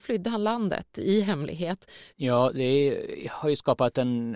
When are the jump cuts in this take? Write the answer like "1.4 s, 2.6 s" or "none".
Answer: 2.1 s